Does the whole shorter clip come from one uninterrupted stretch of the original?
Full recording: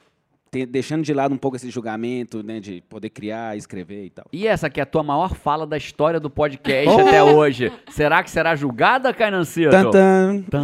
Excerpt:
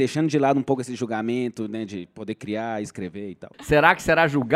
no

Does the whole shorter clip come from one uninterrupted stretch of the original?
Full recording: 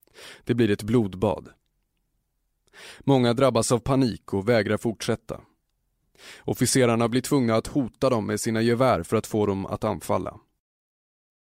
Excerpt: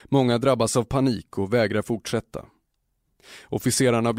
yes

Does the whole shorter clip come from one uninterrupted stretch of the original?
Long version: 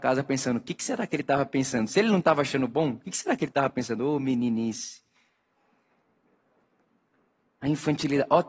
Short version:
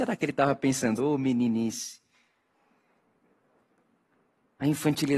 no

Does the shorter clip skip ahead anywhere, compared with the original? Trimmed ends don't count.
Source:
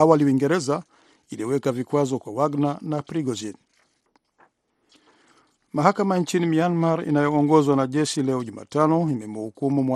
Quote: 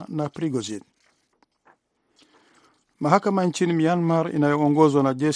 no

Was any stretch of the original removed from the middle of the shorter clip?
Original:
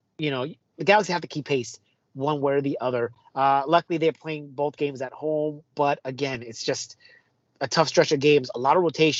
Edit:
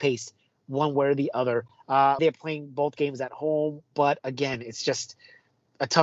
yes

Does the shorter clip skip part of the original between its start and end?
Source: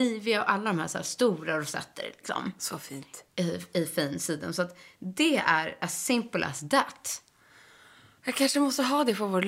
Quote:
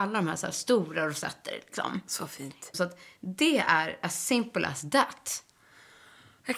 yes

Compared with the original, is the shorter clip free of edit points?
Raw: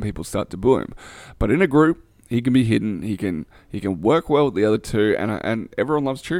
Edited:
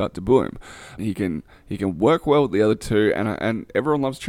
no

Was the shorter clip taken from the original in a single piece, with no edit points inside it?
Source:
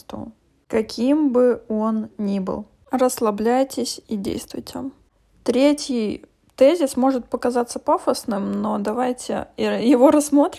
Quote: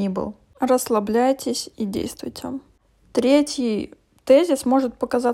yes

